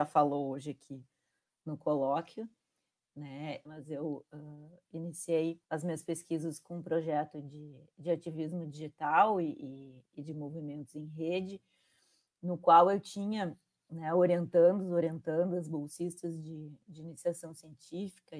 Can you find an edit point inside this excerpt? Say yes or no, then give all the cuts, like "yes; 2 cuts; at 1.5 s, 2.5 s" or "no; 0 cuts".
yes; 2 cuts; at 3.6 s, 5.6 s